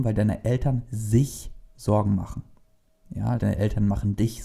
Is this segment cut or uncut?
cut